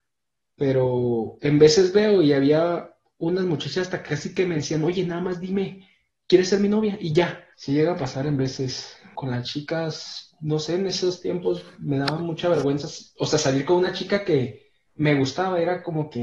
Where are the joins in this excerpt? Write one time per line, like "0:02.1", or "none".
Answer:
0:07.5
0:09.2